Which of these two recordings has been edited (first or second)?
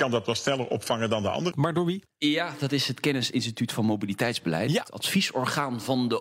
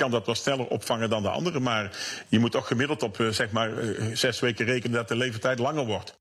first